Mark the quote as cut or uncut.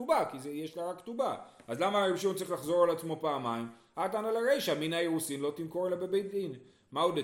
uncut